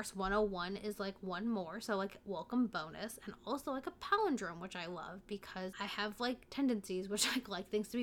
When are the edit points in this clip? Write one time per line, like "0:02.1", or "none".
none